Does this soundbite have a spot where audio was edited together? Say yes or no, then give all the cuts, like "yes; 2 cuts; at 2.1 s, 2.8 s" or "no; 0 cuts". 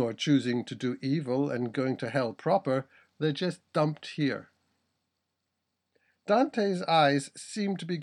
no; 0 cuts